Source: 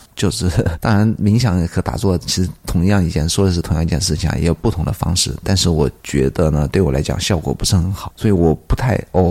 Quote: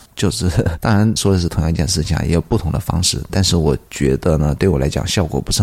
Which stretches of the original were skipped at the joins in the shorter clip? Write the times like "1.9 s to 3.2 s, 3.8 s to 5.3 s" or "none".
1.2 s to 3.3 s